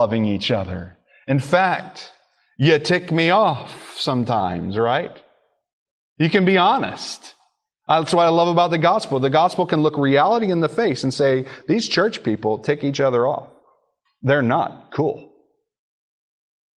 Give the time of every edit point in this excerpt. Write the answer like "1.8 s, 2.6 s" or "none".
none